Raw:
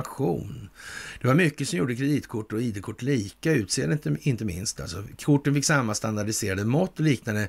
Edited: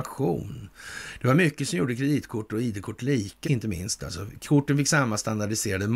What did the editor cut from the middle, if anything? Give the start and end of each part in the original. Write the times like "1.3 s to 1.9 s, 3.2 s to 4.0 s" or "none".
3.4 s to 4.2 s